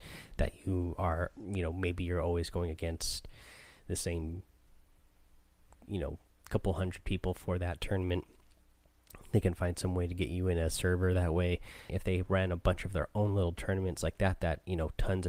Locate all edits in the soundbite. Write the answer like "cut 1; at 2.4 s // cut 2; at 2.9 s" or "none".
cut 1; at 11.9 s